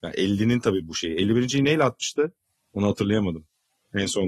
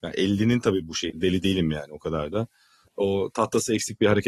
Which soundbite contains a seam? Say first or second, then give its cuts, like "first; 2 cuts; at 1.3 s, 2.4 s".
second; 2 cuts; at 1.1 s, 2.9 s